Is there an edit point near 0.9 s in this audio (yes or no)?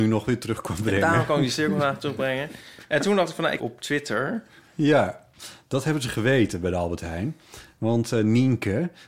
no